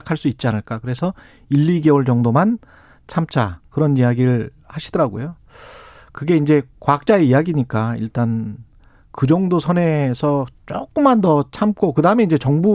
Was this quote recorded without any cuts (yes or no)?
yes